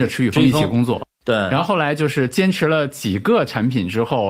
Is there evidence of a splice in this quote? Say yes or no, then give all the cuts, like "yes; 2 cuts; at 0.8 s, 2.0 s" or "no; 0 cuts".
no; 0 cuts